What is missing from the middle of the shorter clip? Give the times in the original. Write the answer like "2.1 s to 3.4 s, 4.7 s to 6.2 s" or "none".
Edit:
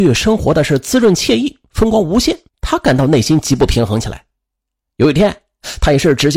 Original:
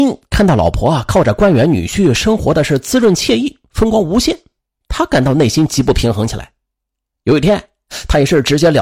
4.5 s to 4.7 s